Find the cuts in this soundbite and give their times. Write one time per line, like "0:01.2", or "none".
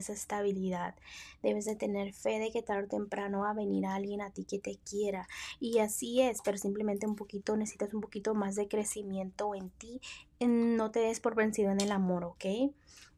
none